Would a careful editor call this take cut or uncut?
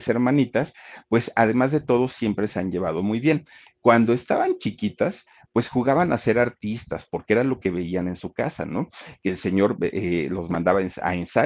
uncut